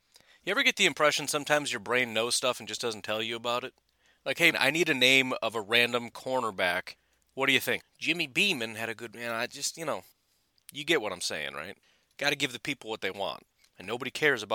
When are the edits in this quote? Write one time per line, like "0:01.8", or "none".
0:04.5
0:07.8